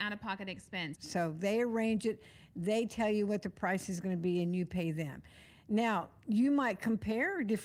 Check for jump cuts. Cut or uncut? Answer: cut